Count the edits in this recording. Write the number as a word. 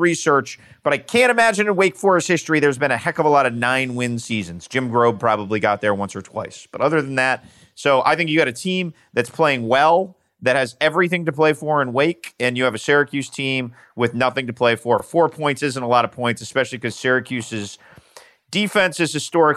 zero